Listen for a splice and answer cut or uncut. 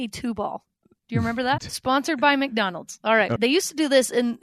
cut